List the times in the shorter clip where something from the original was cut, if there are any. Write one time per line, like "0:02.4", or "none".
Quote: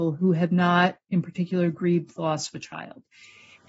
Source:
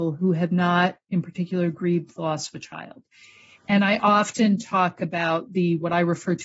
none